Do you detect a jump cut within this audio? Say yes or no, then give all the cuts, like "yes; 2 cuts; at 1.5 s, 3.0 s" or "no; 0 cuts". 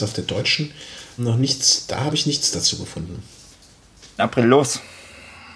yes; 2 cuts; at 1.2 s, 4.2 s